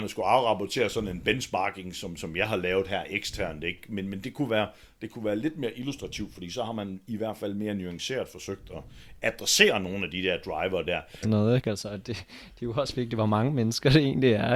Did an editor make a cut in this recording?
yes; 1 cut; at 11.2 s

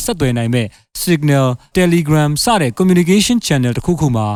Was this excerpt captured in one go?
no; 1 cut; at 1.7 s

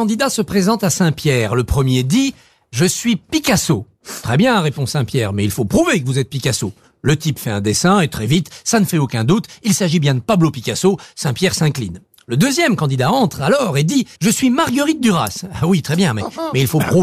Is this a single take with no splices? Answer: no; 1 cut; at 14.1 s

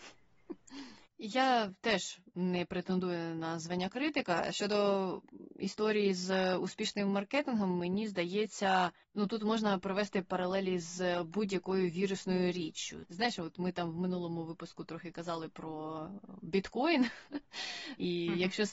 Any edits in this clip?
no; 0 cuts

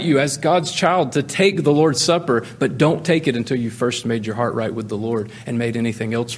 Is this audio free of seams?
yes; 0 cuts

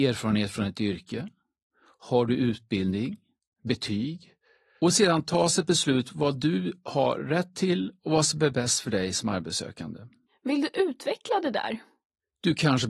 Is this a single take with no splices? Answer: yes; 0 cuts

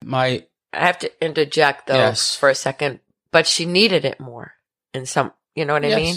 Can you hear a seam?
no; 0 cuts

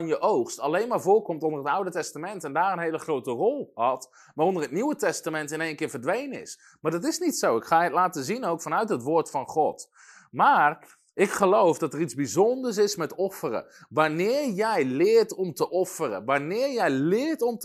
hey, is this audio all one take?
yes; 0 cuts

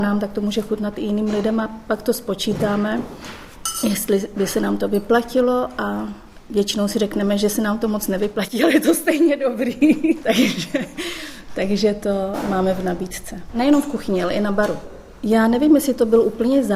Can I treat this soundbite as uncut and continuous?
no; 1 cut; at 13.5 s

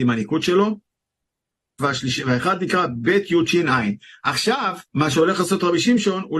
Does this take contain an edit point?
yes; 2 cuts; at 1.8 s, 4.9 s

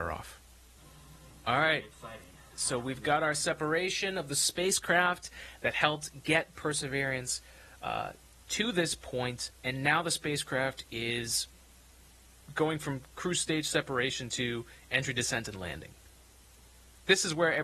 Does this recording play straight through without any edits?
yes; 0 cuts

